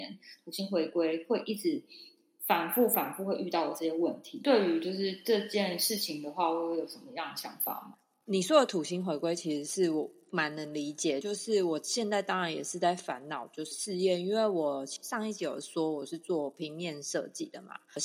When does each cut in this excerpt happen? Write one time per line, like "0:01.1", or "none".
none